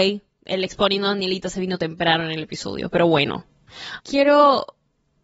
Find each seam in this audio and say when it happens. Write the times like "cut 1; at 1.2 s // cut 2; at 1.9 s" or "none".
cut 1; at 4.0 s